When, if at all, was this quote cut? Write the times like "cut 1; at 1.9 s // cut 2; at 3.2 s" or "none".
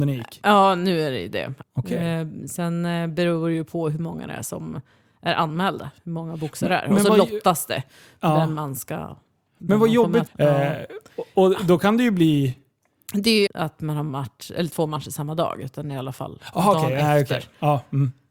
cut 1; at 1.6 s // cut 2; at 10.3 s // cut 3; at 13.5 s